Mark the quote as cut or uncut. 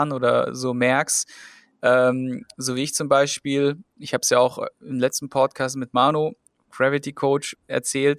uncut